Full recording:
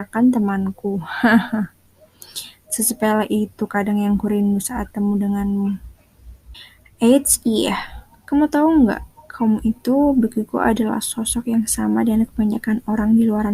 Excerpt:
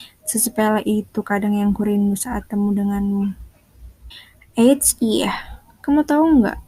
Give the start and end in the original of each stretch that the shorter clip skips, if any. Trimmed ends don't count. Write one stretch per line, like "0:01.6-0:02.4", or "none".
none